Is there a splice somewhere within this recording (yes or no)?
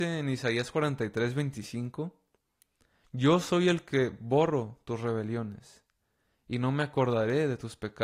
no